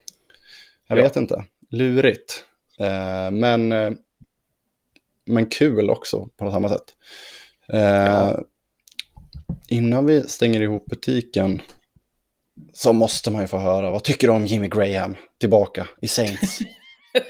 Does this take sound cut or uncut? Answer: uncut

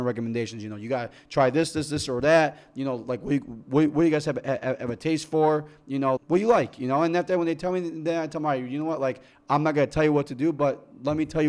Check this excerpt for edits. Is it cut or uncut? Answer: cut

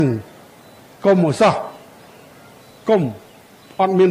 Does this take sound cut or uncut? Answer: uncut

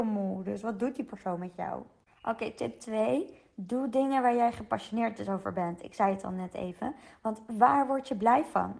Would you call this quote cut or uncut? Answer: uncut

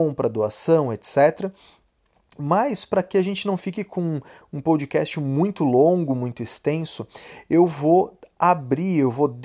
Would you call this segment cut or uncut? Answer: uncut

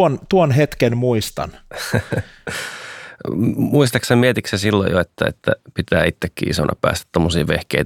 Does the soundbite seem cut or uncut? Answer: uncut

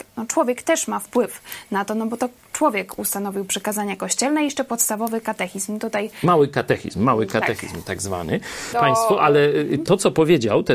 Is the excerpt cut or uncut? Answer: cut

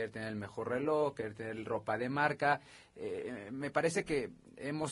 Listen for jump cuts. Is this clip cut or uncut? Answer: uncut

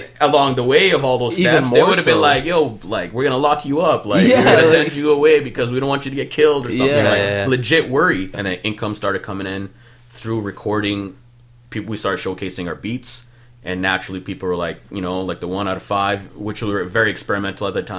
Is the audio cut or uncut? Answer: cut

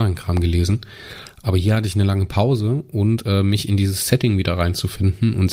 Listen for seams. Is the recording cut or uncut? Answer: uncut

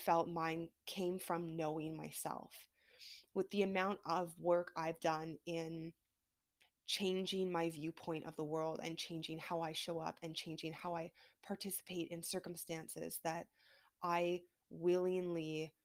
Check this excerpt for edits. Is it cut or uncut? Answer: uncut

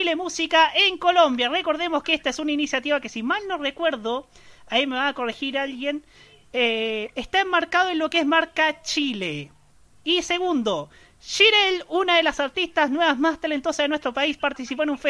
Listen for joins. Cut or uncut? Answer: uncut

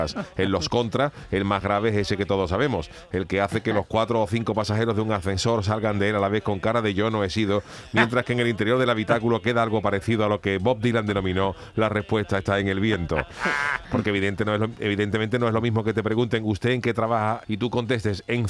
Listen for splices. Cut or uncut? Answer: cut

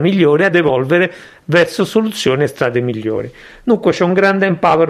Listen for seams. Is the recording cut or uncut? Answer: uncut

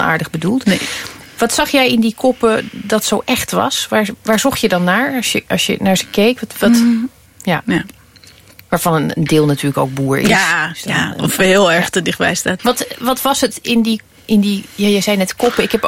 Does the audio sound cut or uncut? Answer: cut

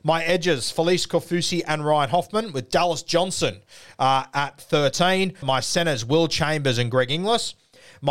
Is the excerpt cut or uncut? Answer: cut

